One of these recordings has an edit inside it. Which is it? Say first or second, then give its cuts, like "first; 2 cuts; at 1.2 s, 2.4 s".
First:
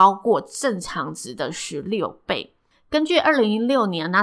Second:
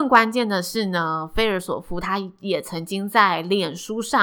first; 1 cut; at 2.7 s